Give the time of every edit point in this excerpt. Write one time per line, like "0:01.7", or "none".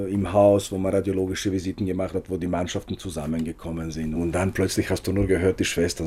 0:04.2

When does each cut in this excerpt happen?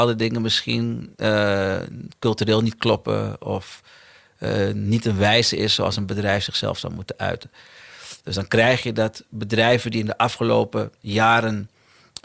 none

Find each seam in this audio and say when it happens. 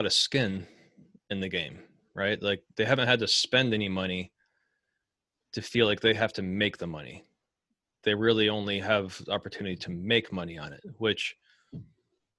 none

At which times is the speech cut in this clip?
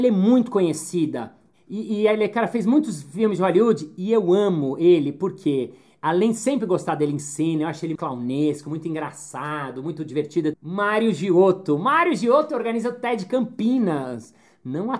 0:08.0
0:10.5

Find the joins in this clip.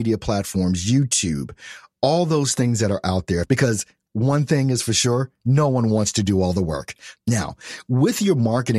0:03.4
0:07.2

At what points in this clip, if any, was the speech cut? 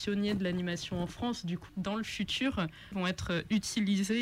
0:01.7
0:02.9

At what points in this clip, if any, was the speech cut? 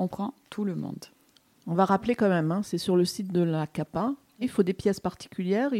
0:04.4

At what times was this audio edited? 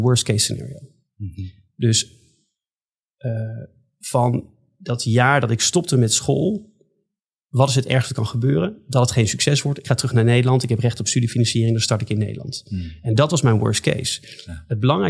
none

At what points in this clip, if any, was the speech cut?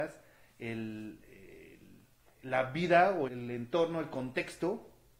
0:03.3

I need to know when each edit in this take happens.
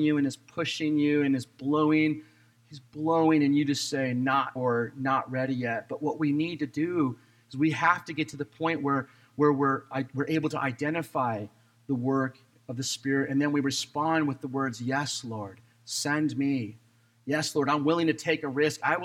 0:04.6

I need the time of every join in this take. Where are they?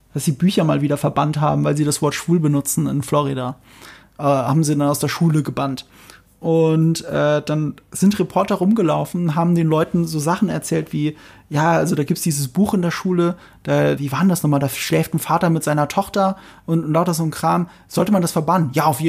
0:14.0

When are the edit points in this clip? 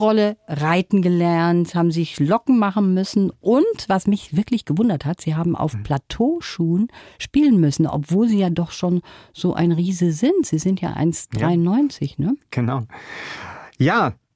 none

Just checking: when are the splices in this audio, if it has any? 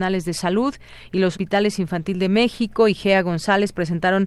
0:01.3

